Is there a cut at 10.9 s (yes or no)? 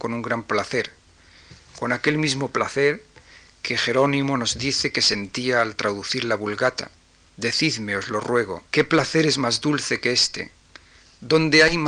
no